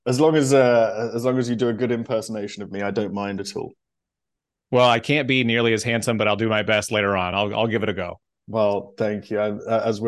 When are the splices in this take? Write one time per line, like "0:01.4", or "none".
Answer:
none